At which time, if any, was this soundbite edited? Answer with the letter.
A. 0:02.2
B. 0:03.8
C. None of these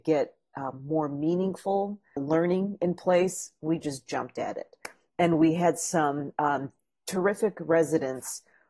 A